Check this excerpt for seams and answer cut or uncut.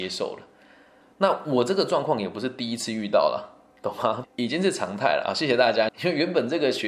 cut